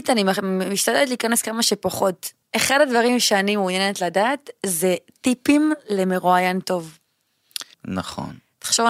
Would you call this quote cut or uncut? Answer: cut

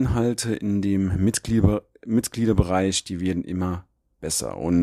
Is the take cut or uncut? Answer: uncut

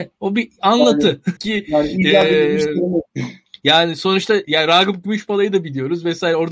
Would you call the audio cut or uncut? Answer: cut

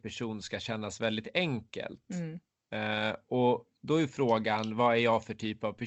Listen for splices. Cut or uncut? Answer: uncut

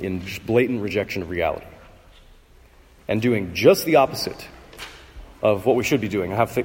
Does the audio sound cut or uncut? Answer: cut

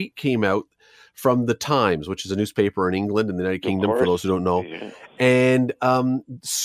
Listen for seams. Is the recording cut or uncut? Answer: uncut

